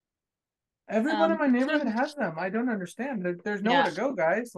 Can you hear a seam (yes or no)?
no